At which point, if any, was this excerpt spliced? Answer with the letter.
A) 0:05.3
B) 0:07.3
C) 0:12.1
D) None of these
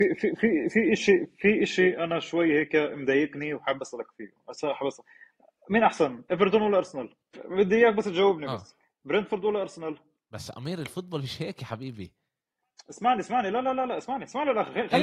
B